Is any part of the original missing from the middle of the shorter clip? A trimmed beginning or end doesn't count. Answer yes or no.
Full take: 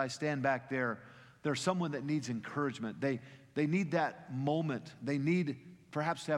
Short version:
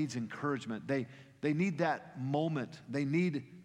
no